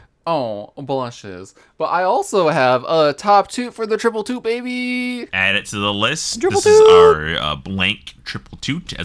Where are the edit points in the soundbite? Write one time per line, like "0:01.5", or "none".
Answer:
none